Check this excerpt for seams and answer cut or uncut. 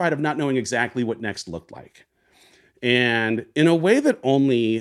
uncut